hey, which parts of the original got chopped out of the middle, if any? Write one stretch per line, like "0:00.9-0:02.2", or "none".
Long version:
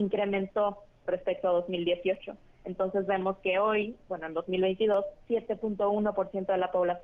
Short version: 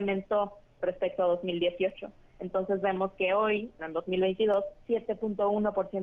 0:04.0-0:04.2